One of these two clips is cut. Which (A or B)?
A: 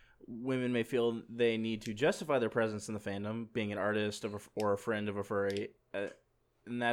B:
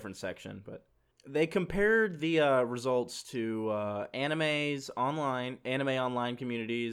B